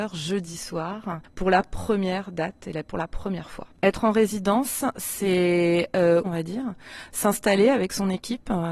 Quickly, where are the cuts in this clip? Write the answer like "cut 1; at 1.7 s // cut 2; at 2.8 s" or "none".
cut 1; at 3.8 s // cut 2; at 6.2 s